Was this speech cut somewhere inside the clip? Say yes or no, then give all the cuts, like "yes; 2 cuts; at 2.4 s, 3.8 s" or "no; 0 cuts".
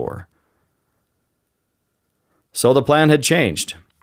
no; 0 cuts